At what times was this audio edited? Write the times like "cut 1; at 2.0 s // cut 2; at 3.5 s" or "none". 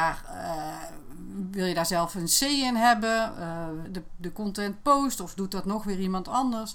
cut 1; at 3.8 s